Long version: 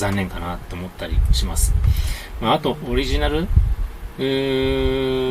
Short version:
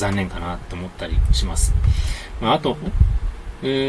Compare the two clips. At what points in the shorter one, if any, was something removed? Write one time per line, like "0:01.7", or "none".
0:02.9